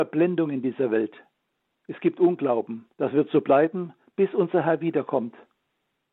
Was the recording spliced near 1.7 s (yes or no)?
no